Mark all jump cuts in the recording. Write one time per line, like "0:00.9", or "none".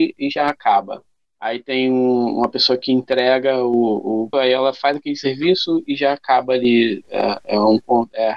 0:04.3